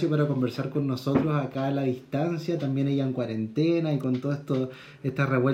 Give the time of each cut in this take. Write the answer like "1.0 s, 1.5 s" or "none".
none